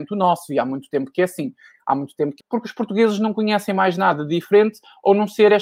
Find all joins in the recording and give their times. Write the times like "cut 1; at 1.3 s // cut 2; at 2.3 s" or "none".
cut 1; at 2.4 s